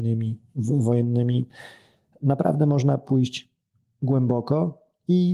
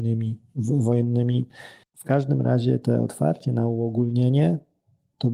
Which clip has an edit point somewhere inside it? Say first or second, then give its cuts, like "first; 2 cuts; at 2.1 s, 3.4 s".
second; 1 cut; at 1.8 s